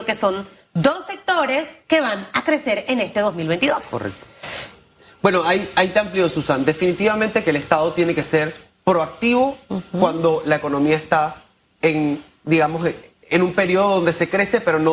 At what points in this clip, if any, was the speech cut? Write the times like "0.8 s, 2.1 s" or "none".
none